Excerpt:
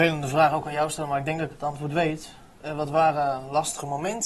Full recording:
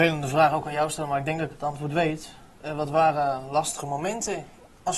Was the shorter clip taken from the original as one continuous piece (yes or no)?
yes